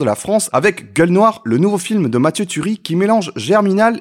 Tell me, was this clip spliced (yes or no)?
no